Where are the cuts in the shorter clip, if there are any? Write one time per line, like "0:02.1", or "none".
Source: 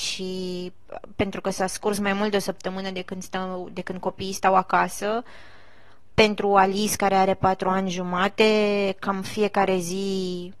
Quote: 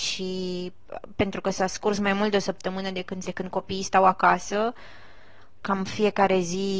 0:03.2
0:05.6